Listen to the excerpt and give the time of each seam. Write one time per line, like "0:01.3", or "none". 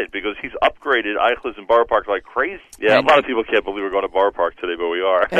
0:02.6